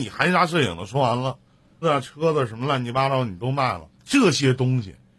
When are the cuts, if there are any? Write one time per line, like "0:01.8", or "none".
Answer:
0:01.8
0:03.9